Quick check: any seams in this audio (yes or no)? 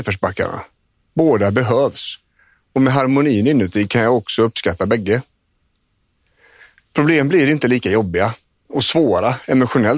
no